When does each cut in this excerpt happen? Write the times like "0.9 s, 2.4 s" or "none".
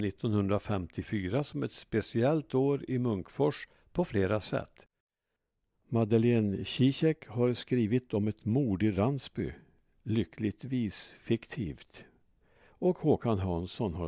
none